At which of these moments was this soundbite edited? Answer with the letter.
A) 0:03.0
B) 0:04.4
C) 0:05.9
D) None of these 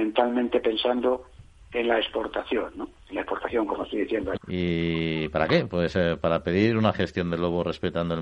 B